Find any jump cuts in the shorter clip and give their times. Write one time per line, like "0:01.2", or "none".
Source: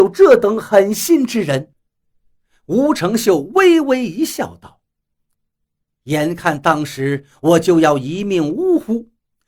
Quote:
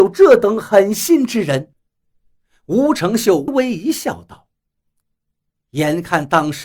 0:03.5